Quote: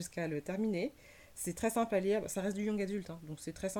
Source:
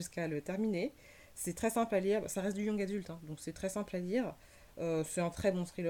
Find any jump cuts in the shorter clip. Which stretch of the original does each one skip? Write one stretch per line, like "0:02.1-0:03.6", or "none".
none